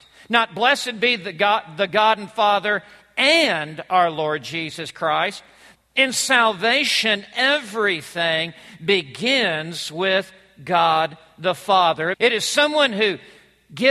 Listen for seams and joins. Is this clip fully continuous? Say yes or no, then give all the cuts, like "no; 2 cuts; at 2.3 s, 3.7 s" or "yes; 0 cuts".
no; 2 cuts; at 5.8 s, 12.1 s